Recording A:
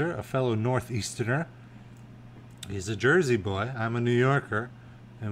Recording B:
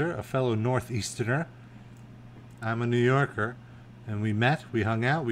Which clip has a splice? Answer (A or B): B